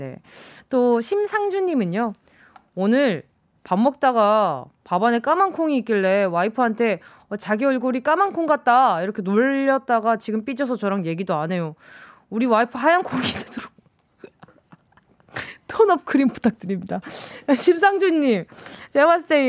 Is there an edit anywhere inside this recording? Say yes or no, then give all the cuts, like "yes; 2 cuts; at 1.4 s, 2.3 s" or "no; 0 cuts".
no; 0 cuts